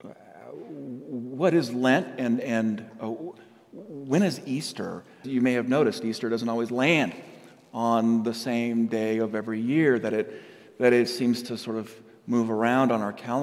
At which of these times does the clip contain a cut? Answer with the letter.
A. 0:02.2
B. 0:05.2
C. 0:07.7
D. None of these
B